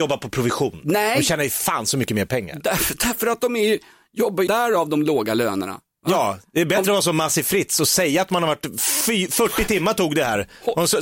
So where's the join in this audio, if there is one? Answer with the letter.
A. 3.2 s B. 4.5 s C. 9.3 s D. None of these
B